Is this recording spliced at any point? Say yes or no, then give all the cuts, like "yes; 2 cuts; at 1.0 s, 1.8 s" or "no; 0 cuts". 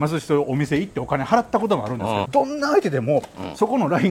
yes; 1 cut; at 2.2 s